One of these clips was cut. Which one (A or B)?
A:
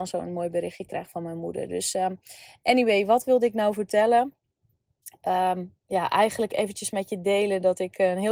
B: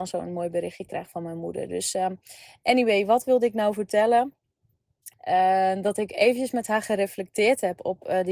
B